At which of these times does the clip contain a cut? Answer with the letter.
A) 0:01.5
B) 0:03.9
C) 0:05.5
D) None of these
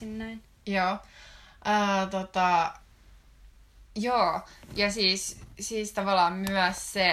B